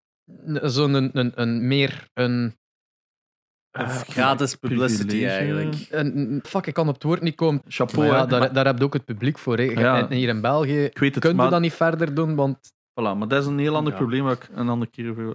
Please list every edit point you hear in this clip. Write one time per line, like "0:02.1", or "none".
0:06.4
0:07.6